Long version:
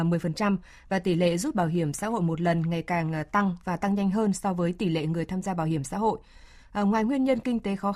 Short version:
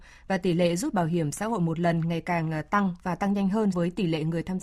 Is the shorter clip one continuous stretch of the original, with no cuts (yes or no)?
no